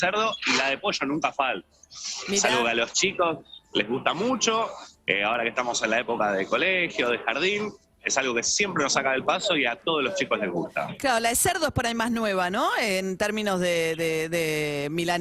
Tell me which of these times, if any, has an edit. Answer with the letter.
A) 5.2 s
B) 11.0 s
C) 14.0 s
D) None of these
D